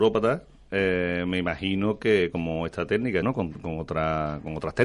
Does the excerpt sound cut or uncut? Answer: cut